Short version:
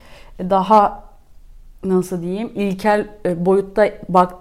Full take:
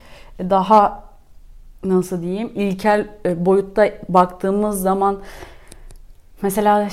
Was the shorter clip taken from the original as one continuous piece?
yes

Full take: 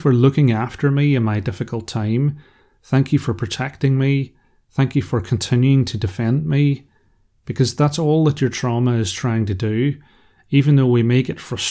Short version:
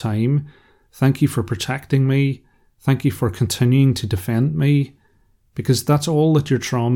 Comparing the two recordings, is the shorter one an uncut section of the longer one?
yes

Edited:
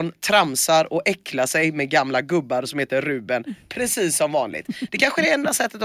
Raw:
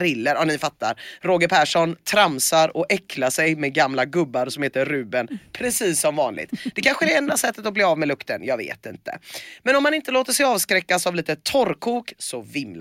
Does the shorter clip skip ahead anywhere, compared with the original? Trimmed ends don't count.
no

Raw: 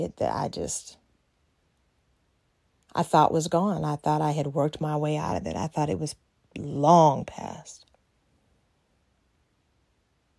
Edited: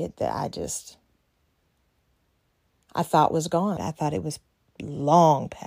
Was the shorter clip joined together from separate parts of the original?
yes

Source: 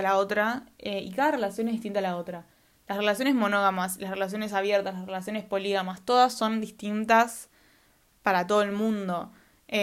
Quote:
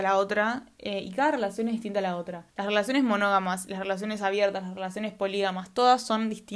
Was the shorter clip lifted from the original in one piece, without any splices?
no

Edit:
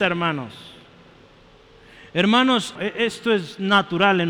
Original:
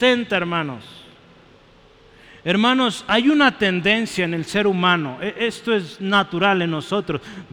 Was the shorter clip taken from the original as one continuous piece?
no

